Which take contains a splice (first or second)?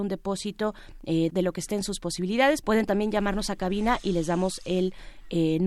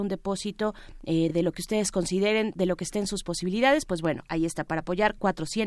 first